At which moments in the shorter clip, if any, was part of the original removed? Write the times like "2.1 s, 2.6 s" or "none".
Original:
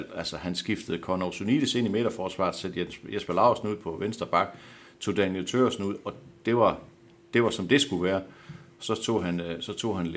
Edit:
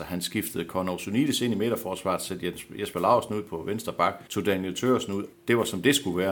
4.3 s, 5.3 s